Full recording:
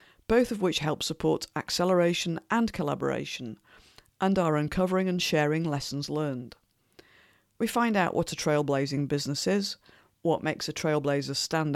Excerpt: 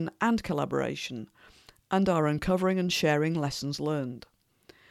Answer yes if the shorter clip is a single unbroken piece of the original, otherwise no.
yes